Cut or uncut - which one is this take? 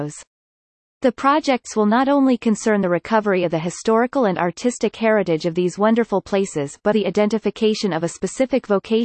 cut